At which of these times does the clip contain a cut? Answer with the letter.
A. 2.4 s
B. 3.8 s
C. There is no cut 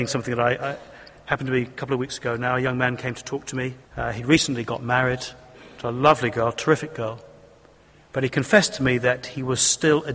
B